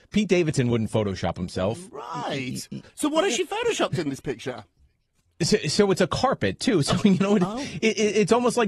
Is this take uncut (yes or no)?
yes